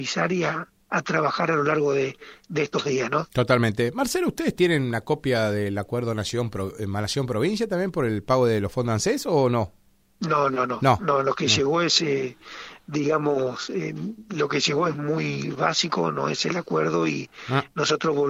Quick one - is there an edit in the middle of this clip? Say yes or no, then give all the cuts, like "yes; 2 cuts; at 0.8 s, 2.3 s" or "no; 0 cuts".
no; 0 cuts